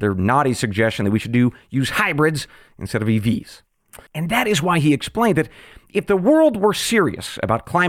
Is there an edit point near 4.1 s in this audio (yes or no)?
yes